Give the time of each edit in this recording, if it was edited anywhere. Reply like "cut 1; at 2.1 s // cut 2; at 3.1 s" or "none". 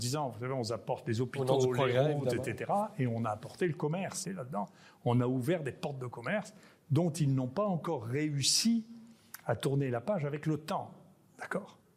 cut 1; at 4.2 s